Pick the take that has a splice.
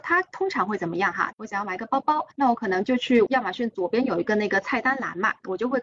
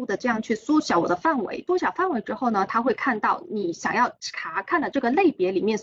first; 1 cut; at 1.3 s

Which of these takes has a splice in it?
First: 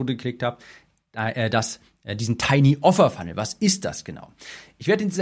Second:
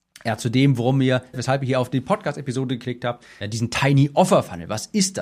second; 2 cuts; at 1.3 s, 3.4 s

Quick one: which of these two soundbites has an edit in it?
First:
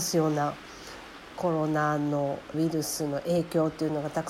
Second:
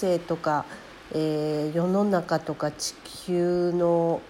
first; 1 cut; at 2.5 s

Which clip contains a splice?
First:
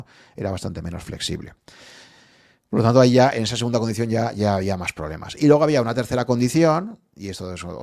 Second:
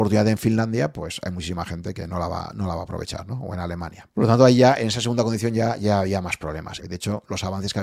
second; 2 cuts; at 4.1 s, 6.8 s

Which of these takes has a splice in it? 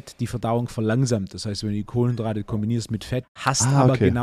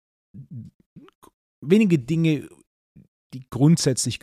first; 1 cut; at 3.2 s

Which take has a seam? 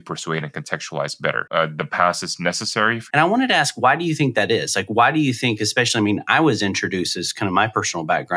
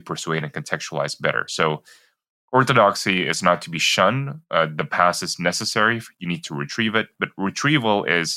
first; 2 cuts; at 1.5 s, 3.1 s

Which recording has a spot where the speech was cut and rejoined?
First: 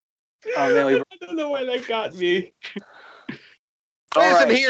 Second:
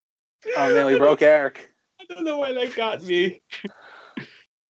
first; 1 cut; at 1.0 s

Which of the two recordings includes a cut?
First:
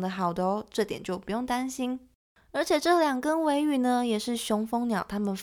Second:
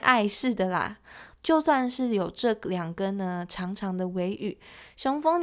second; 1 cut; at 1.4 s

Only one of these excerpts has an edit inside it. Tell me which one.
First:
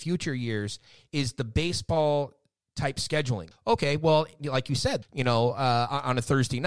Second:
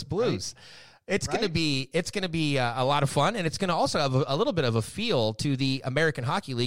first; 2 cuts; at 3.5 s, 5.0 s

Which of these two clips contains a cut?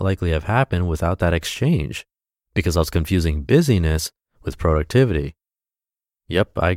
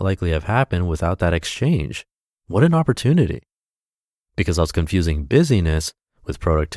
first; 1 cut; at 2.4 s

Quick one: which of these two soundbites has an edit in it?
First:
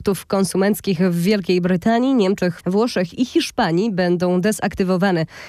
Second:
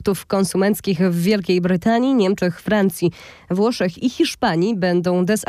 first; 1 cut; at 2.6 s

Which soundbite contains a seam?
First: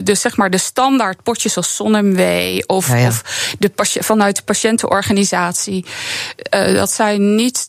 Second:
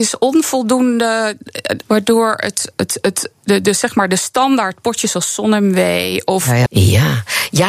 second; 2 cuts; at 1.8 s, 6.7 s

